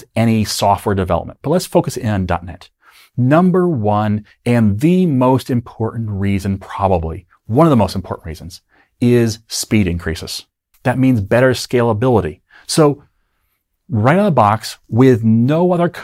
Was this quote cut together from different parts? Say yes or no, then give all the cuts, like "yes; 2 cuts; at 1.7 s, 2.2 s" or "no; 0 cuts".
yes; 1 cut; at 10.7 s